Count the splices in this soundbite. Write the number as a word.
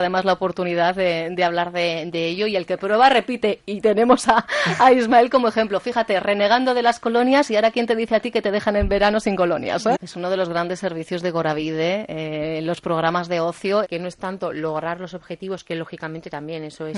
two